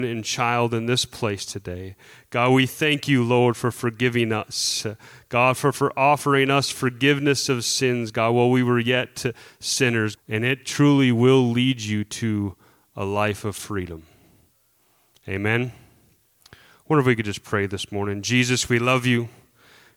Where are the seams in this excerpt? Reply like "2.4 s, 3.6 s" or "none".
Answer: 10.1 s